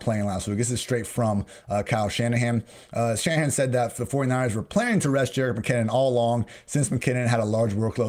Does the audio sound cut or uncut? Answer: uncut